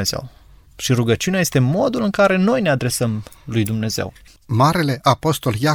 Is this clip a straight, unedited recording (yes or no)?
no